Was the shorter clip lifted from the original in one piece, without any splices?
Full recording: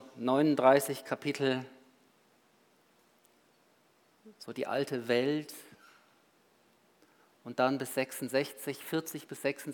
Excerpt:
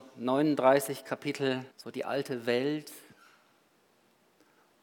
no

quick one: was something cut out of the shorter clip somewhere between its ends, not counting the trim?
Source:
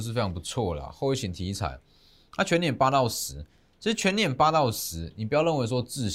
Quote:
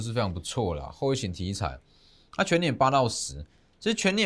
no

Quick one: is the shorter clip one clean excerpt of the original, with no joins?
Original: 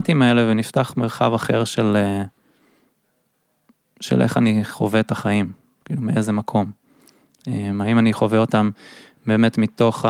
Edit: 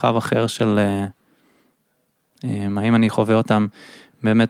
no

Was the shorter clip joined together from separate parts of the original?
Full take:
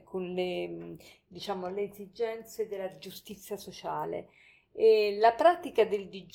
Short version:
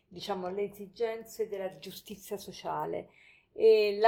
no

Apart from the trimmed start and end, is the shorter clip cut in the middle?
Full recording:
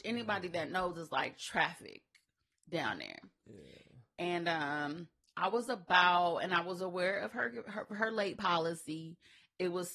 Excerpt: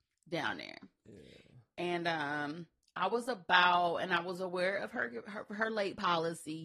no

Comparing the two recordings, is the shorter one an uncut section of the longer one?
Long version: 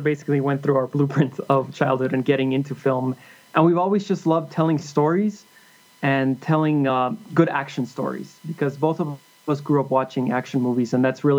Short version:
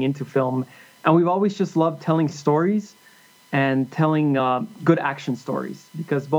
yes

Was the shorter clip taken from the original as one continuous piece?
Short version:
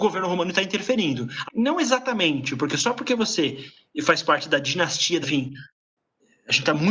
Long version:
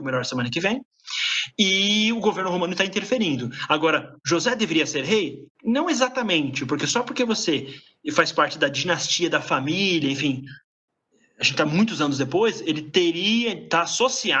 no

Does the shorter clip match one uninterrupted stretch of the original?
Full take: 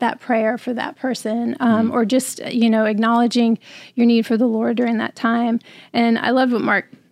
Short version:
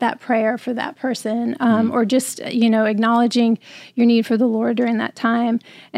yes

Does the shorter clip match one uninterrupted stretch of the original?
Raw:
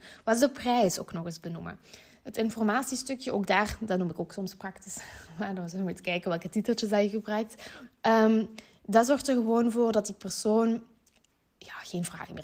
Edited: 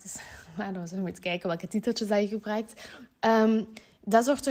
yes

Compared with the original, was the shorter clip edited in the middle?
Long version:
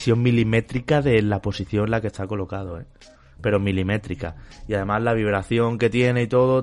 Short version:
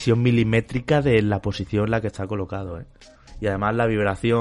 yes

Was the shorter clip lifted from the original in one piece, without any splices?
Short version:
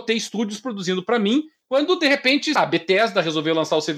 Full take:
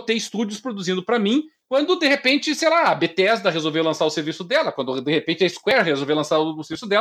no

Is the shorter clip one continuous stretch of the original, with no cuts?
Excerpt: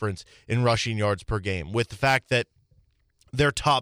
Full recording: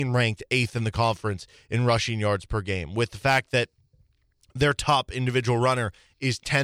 yes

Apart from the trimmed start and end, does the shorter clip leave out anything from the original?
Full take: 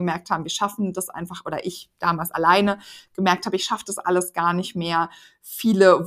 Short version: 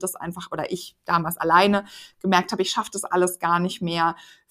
no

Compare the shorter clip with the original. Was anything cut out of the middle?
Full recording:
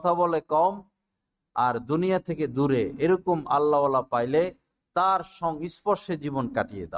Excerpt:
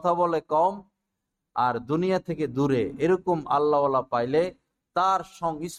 no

